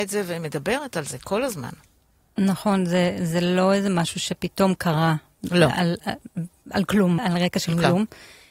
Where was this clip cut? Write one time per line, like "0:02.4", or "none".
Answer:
0:07.2